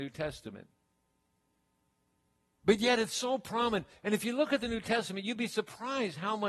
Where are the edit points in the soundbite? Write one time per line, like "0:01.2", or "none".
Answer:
none